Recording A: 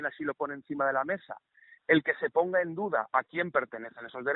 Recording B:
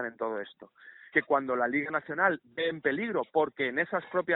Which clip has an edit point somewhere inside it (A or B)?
B